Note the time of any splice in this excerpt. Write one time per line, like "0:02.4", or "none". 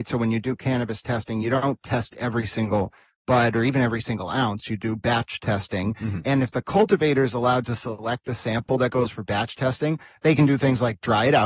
none